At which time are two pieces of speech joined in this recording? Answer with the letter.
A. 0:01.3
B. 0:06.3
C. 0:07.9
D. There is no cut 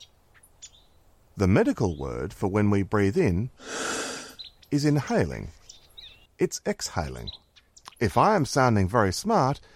B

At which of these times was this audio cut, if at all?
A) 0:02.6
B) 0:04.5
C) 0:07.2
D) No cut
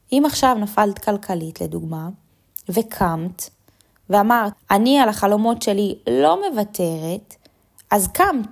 B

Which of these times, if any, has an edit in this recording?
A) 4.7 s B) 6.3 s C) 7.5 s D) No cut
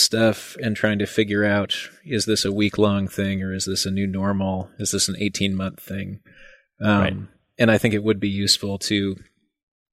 D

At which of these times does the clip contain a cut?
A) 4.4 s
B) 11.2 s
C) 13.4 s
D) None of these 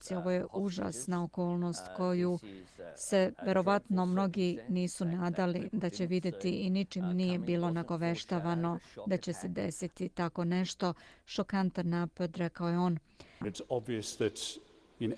C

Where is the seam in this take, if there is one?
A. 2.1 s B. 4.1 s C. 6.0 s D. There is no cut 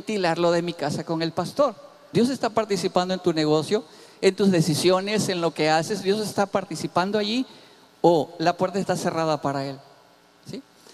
A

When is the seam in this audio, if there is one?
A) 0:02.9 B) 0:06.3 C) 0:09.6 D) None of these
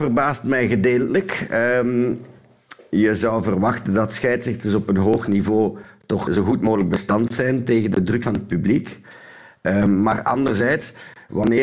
B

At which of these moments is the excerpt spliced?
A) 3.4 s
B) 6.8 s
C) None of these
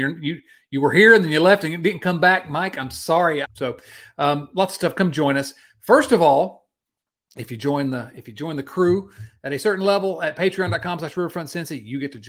A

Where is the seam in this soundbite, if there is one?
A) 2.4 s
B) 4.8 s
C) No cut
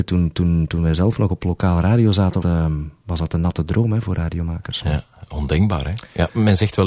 A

